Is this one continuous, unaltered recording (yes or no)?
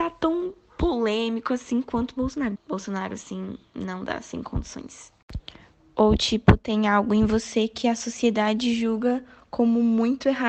no